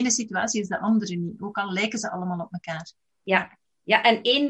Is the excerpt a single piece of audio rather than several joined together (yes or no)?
yes